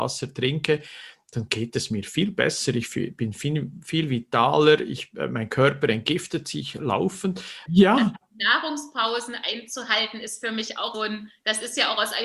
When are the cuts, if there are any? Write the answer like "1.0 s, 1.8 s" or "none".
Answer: 7.7 s, 10.9 s